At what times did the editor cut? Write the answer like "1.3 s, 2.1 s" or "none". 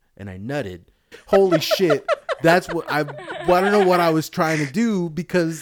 1.1 s